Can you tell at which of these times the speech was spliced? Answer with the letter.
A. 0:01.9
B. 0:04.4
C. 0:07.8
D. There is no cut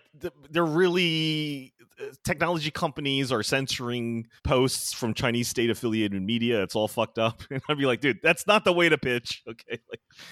B